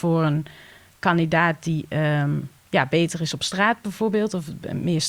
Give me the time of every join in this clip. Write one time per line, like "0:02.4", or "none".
0:02.6